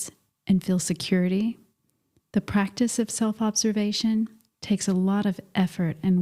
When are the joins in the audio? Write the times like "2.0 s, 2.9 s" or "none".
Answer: 2.3 s